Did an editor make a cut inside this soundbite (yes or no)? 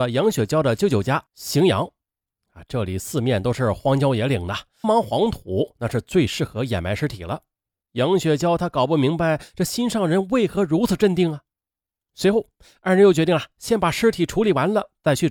yes